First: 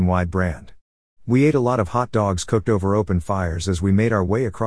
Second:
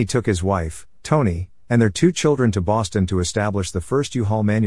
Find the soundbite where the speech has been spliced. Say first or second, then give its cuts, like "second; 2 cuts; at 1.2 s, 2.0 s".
first; 1 cut; at 1.1 s